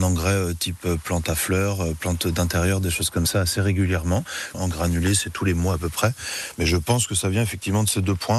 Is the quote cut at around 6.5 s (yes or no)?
no